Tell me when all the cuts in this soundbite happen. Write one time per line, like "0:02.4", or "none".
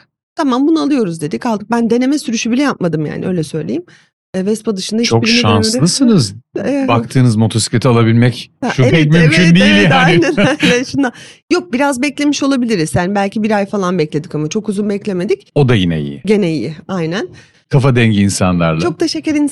0:08.9
0:17.5